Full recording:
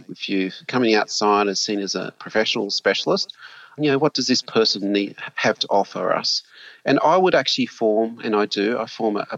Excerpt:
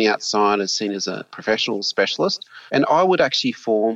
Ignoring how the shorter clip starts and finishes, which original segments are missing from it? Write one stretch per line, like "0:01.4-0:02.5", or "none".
0:03.5-0:06.8